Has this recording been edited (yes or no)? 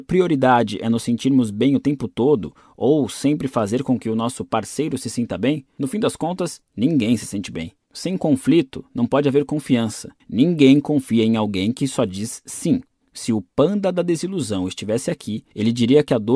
yes